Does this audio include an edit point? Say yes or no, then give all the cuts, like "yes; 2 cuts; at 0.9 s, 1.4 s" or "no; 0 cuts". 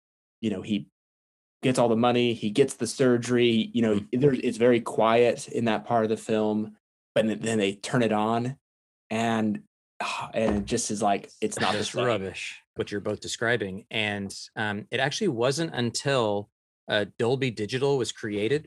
yes; 1 cut; at 12.8 s